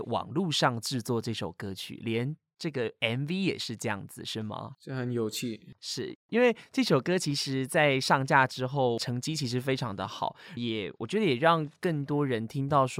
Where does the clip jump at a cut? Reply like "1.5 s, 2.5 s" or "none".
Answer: 4.7 s, 10.6 s